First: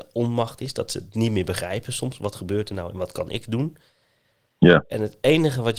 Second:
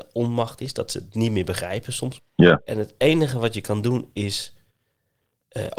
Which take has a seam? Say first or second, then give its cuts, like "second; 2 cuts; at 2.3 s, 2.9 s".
second; 1 cut; at 2.2 s